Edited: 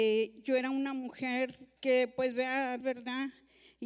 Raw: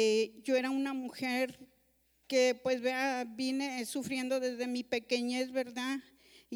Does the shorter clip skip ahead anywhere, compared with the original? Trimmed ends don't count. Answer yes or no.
yes